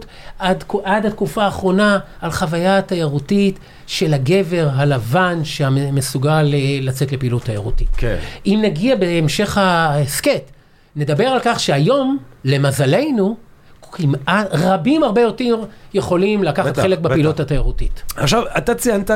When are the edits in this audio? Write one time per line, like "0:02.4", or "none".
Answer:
none